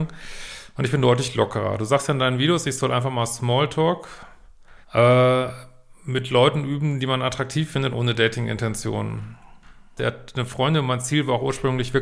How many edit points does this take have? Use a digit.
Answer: 3